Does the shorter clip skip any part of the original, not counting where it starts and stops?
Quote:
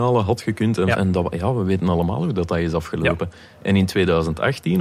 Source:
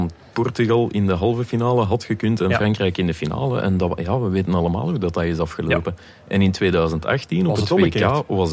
yes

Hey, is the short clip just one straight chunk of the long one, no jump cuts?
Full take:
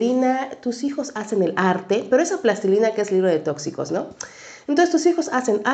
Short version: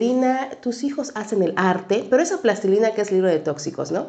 yes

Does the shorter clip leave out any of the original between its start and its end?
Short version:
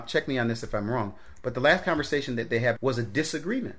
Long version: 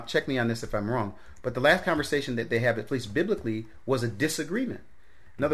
yes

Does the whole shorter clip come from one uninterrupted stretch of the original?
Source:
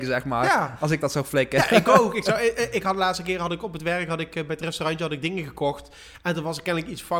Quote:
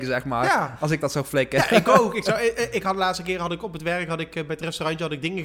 yes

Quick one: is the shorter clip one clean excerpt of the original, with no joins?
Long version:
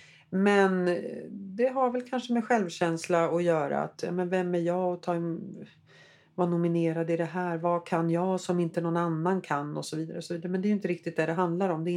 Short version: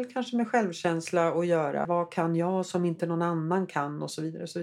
no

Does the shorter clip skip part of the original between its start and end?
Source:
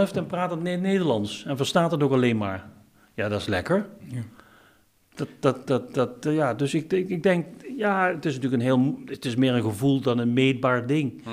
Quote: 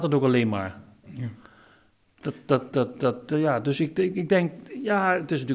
yes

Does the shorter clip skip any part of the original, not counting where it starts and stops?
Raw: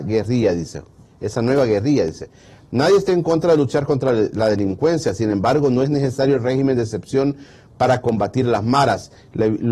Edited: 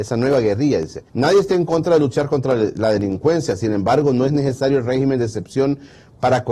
yes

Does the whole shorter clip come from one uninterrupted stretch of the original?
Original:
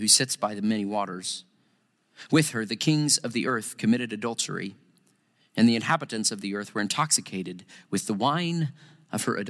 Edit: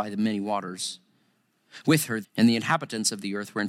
no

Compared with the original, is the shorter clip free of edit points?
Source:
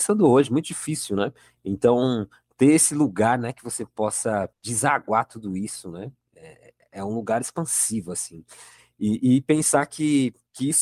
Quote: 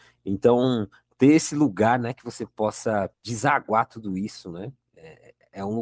yes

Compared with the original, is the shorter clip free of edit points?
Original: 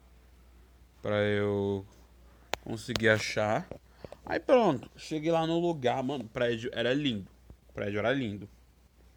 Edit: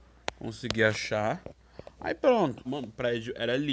no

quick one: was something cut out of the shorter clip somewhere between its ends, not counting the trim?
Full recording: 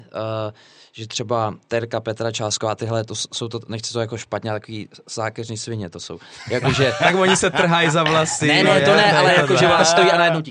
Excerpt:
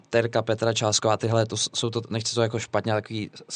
no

